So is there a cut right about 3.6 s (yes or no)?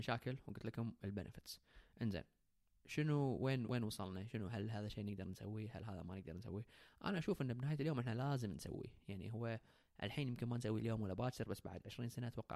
yes